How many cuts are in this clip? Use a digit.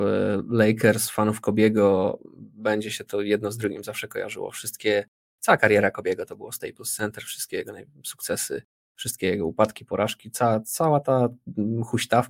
0